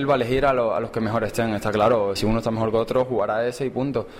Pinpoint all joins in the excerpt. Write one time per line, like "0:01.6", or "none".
0:02.2